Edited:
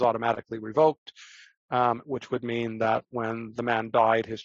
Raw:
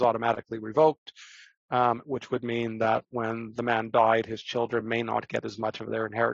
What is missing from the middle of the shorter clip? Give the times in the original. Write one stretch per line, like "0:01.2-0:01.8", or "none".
none